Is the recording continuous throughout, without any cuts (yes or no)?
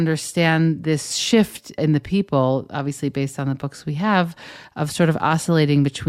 no